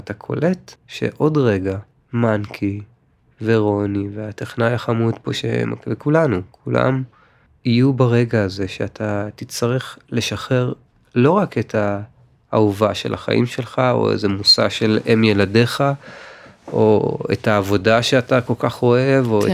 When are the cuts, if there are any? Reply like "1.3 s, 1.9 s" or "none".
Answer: none